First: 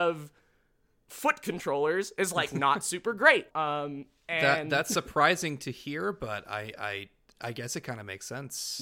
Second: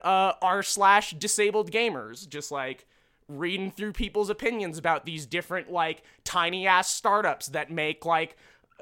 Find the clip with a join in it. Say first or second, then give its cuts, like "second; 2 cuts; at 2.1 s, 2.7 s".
first; 1 cut; at 3.5 s